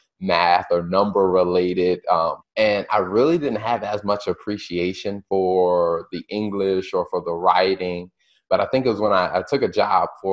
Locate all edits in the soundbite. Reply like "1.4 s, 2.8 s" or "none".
2.4 s